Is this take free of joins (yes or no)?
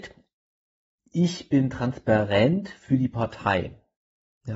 yes